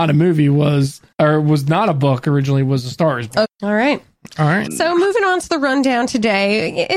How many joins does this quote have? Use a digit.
3